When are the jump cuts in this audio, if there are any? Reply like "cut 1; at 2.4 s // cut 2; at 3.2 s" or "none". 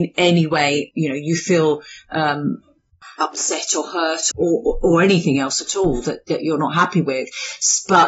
cut 1; at 0.9 s // cut 2; at 4.3 s